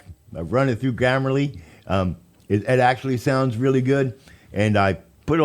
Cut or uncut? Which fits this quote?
uncut